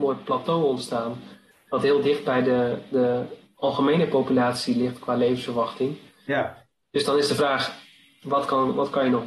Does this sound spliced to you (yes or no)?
no